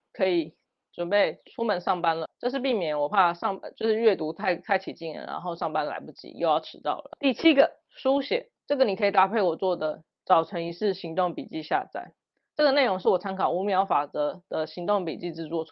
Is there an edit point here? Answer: no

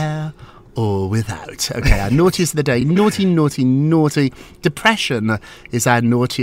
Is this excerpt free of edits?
yes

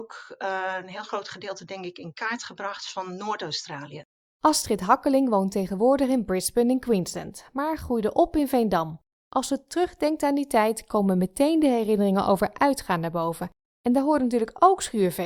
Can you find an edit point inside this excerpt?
no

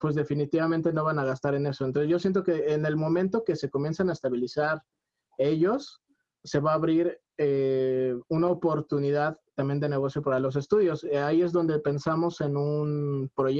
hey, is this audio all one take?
yes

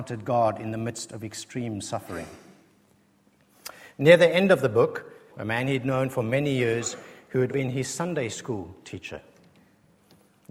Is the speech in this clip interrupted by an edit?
yes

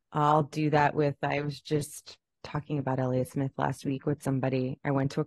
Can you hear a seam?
no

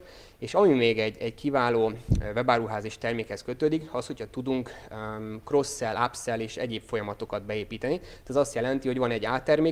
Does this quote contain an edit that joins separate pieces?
no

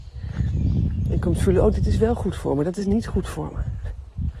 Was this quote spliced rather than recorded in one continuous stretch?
no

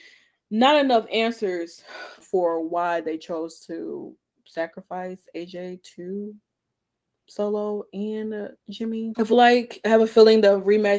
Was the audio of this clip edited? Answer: yes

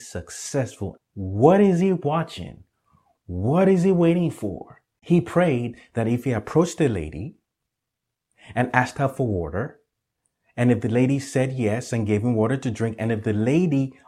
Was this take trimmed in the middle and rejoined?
yes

